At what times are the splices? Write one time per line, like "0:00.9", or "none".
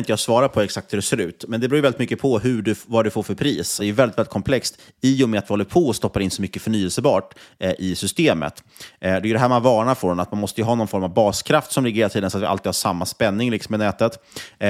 0:03.8